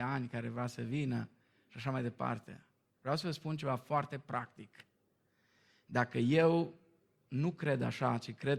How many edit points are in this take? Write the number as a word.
zero